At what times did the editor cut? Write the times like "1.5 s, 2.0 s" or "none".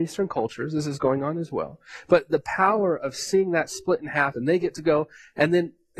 none